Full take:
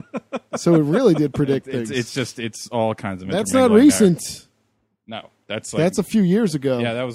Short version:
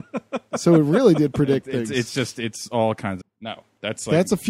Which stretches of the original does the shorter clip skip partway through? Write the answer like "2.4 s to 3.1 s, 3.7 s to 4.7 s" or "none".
3.2 s to 4.9 s